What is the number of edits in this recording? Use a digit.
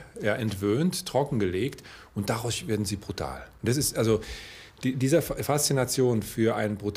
1